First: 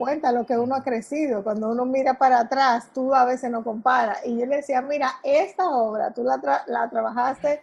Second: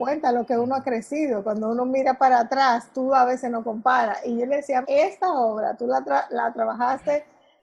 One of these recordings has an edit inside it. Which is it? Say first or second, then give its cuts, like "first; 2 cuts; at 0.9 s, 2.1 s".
second; 1 cut; at 4.8 s